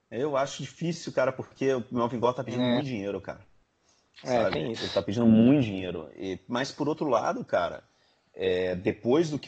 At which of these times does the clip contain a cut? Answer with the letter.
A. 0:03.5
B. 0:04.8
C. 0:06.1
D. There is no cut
D